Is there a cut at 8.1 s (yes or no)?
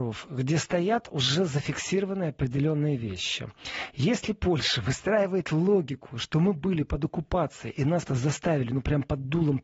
yes